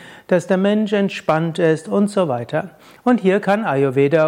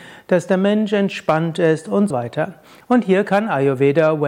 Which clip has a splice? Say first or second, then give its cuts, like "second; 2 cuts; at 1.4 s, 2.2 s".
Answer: second; 1 cut; at 2.1 s